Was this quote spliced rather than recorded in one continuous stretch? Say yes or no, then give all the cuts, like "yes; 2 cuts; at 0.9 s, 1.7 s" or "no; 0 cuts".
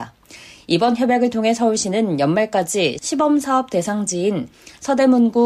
no; 0 cuts